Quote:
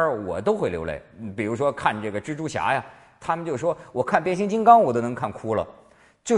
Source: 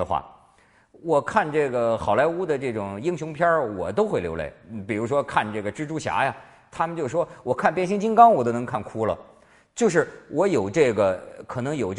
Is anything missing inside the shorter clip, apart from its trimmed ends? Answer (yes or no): no